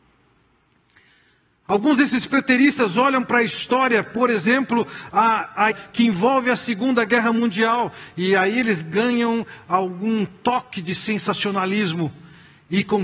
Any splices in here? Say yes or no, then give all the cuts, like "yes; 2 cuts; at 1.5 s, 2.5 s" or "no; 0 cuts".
yes; 1 cut; at 5.7 s